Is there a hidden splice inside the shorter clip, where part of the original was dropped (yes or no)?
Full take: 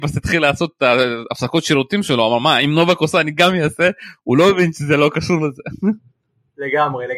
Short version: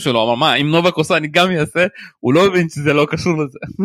no